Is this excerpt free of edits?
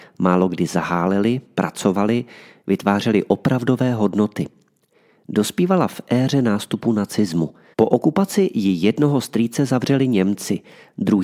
no; 1 cut; at 7.7 s

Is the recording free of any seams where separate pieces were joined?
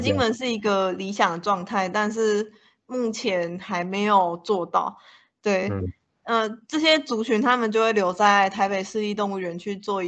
yes; 0 cuts

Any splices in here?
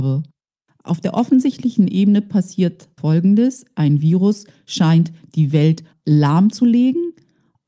yes; 2 cuts; at 3.0 s, 5.9 s

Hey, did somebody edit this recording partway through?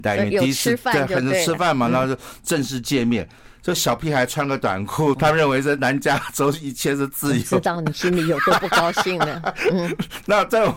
yes; 1 cut; at 5.1 s

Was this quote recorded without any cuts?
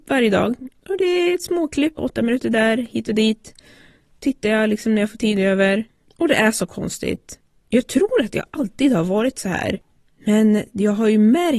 no; 1 cut; at 2.0 s

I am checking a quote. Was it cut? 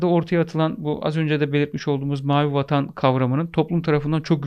no; 0 cuts

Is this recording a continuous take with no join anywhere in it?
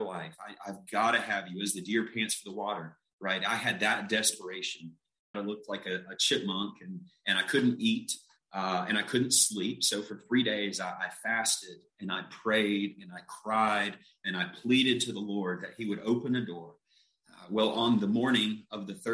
no; 1 cut; at 5.3 s

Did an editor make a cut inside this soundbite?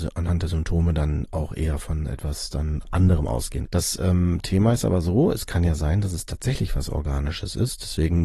yes; 1 cut; at 3.7 s

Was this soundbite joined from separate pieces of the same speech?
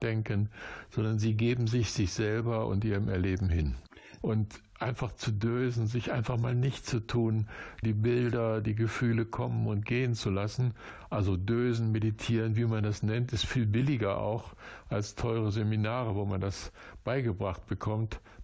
yes; 2 cuts; at 4.2 s, 7.8 s

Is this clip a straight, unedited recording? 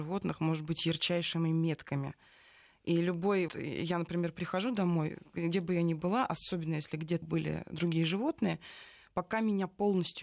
no; 2 cuts; at 3.5 s, 7.2 s

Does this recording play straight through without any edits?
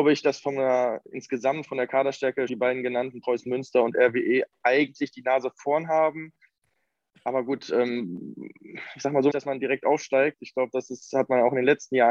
no; 2 cuts; at 2.5 s, 9.3 s

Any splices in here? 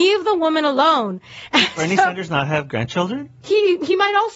no; 0 cuts

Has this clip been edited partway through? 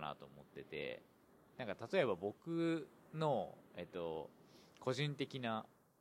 no; 0 cuts

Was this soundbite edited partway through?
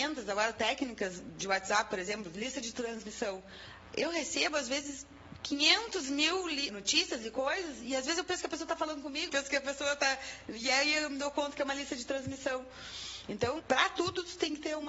yes; 3 cuts; at 6.7 s, 9.3 s, 13.6 s

